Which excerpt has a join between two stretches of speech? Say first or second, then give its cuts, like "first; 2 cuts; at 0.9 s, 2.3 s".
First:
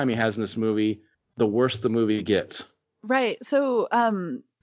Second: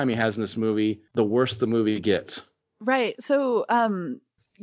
second; 1 cut; at 1.1 s